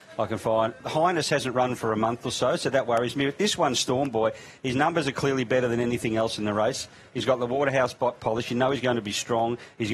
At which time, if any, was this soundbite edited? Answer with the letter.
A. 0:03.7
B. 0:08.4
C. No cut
C